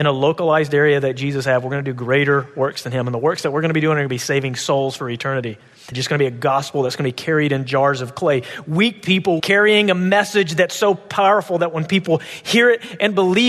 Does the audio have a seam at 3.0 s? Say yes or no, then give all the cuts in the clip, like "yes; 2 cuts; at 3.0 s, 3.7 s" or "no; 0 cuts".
no; 2 cuts; at 5.9 s, 9.4 s